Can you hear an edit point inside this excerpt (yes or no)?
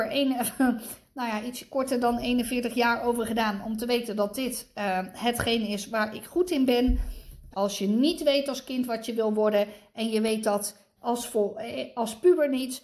yes